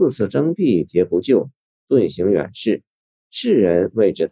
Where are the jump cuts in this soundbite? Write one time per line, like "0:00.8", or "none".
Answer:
none